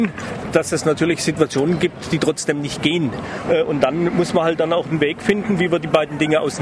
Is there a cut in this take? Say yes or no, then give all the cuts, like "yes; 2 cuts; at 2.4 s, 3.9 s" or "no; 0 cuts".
yes; 1 cut; at 3.4 s